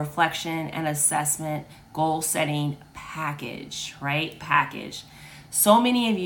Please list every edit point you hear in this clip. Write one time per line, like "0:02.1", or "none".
none

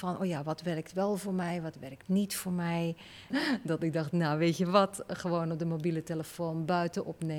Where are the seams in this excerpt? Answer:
0:03.3

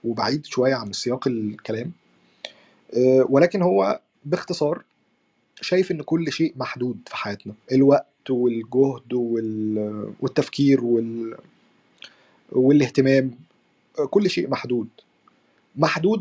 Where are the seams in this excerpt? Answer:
0:06.0
0:07.6

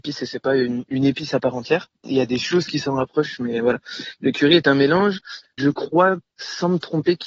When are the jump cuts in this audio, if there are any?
none

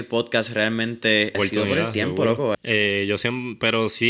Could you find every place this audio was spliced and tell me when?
0:01.3
0:02.5

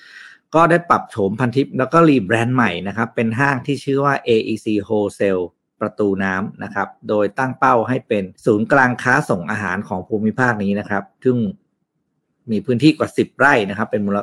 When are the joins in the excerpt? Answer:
0:08.3

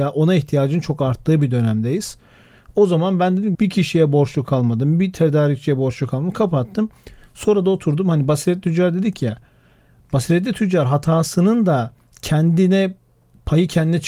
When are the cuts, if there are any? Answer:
0:03.5

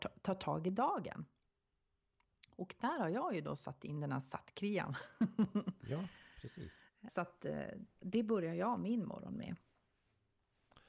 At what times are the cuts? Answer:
0:07.1

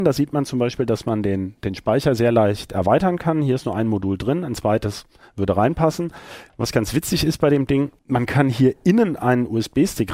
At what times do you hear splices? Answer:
0:06.5
0:08.0

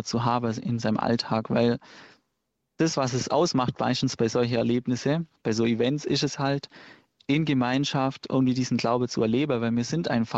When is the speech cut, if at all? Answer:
none

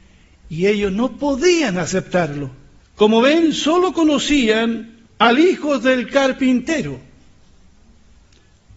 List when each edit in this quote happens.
0:02.8
0:05.1

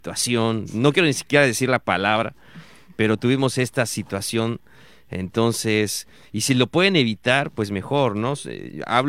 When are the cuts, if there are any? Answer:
none

